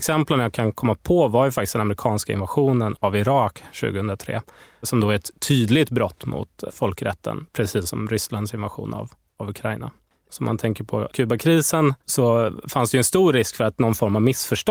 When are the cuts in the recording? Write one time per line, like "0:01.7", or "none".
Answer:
0:10.3
0:12.0